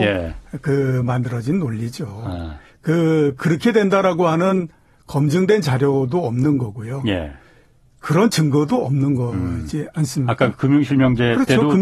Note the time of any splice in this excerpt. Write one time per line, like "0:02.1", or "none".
none